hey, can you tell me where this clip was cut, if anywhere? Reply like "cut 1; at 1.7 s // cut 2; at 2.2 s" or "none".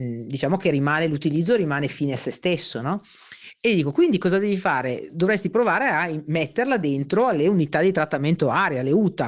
none